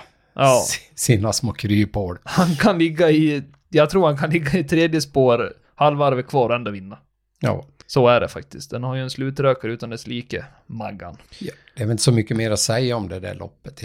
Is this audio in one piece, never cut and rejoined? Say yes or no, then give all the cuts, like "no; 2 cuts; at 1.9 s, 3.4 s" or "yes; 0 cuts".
yes; 0 cuts